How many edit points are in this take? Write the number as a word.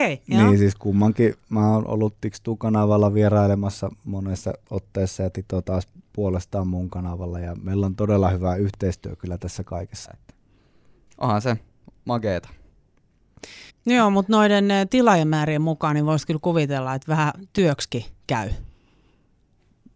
two